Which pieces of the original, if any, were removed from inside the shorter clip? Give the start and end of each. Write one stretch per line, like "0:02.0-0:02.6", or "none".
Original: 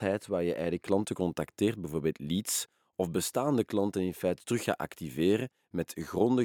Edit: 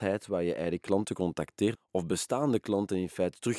0:01.8-0:02.8